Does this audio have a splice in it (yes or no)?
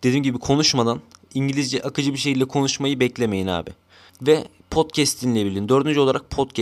yes